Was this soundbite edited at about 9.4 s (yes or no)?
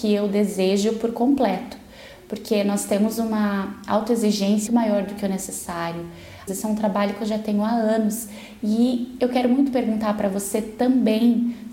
no